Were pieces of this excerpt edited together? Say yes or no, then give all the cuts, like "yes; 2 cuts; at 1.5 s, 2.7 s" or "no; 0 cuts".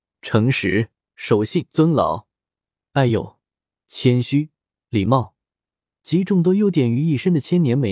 no; 0 cuts